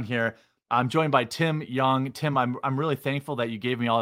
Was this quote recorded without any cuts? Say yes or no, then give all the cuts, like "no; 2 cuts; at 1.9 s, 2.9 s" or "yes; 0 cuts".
yes; 0 cuts